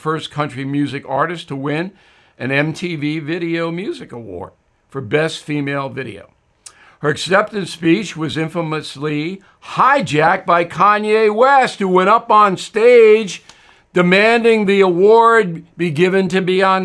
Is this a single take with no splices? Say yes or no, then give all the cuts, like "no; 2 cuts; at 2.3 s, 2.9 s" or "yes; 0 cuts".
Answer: yes; 0 cuts